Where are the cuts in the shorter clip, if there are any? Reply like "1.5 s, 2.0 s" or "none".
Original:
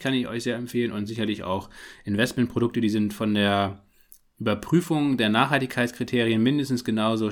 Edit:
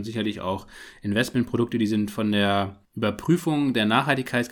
2.9 s